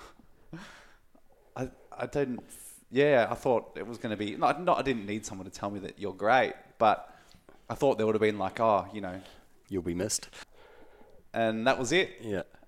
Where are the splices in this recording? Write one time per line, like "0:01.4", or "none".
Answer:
0:10.4